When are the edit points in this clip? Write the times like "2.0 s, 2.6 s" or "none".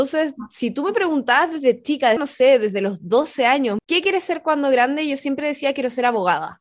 2.2 s, 3.8 s

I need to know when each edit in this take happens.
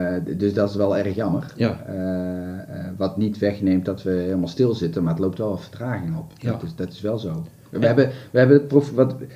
none

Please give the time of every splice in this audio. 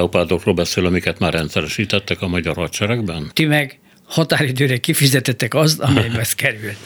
3.3 s

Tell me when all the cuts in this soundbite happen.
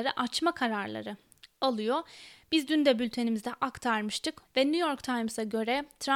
4.4 s

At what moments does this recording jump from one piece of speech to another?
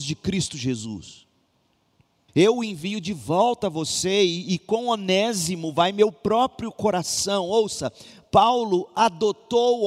2.3 s

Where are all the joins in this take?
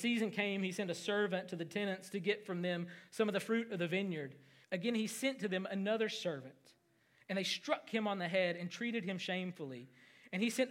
4.6 s

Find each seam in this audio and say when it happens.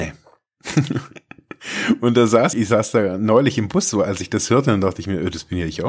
2.5 s

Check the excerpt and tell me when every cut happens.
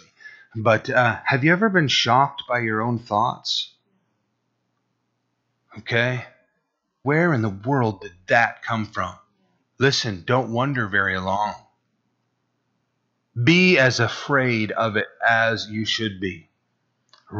7.0 s, 9.6 s

